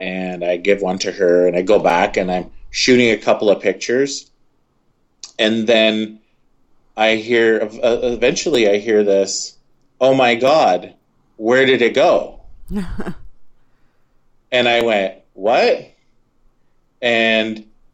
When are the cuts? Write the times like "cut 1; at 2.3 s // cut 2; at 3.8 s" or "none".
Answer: none